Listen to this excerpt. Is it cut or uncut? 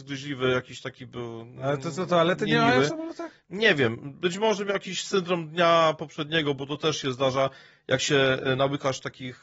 uncut